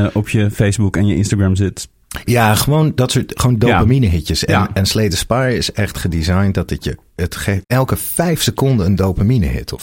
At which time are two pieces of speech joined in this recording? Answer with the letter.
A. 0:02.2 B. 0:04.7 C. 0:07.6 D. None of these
C